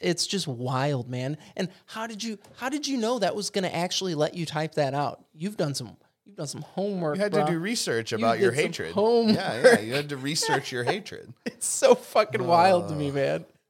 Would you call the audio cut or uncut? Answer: uncut